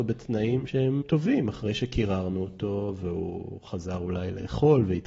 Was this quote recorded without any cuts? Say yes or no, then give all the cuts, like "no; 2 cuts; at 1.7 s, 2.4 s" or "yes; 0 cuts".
no; 1 cut; at 1.0 s